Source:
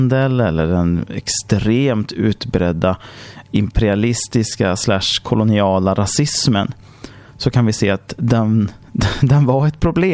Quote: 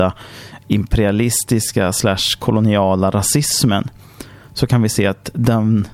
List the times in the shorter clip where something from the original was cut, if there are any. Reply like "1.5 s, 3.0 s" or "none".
none

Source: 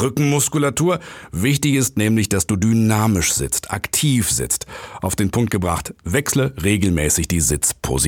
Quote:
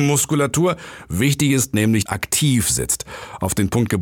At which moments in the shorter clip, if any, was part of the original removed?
2.1 s

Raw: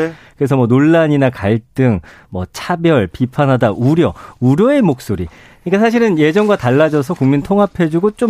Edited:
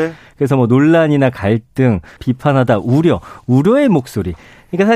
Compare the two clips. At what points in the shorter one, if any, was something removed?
2.2 s

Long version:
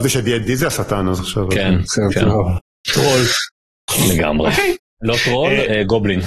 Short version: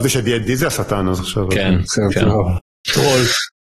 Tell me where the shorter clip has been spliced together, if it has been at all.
none

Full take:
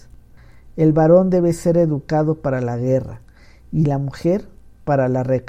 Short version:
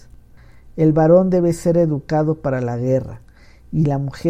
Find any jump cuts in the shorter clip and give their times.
none

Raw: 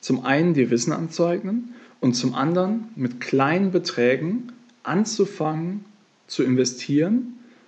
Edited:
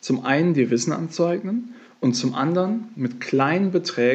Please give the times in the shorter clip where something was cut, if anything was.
none

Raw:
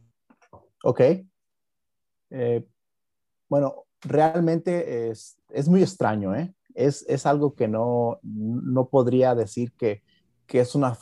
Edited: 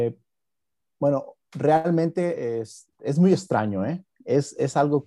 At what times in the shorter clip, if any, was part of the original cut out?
none

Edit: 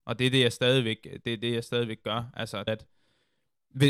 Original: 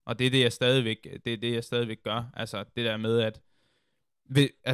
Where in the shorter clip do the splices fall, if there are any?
2.7 s

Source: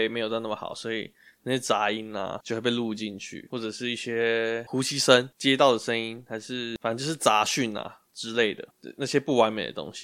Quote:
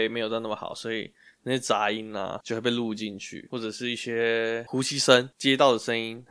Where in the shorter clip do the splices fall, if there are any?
none

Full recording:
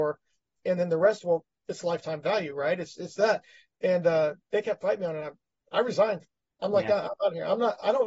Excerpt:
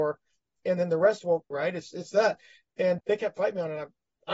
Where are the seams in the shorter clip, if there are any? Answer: 1.5 s, 3.0 s

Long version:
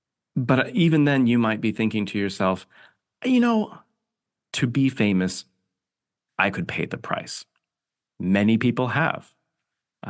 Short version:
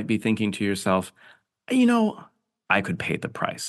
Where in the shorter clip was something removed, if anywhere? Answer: 2.7 s

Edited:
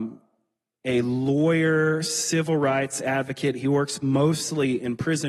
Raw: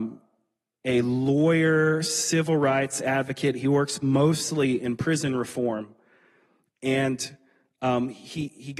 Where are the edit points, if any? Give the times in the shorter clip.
none

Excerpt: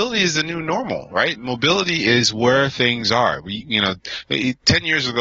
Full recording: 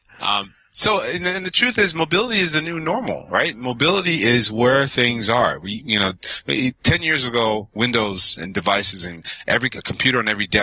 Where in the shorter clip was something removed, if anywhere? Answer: none

